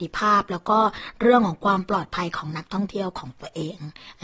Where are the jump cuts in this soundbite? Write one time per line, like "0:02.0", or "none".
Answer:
none